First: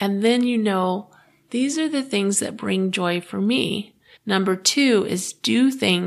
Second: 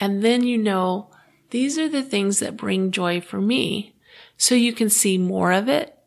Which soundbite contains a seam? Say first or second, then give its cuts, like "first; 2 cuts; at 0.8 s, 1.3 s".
first; 1 cut; at 4.1 s